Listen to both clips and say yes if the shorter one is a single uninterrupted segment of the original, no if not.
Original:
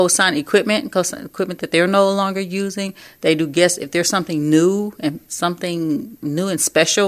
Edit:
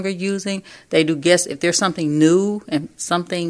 yes